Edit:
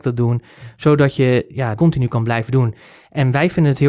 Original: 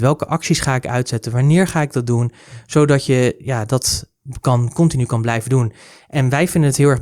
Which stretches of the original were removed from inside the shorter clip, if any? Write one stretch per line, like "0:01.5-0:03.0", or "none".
0:03.7-0:04.7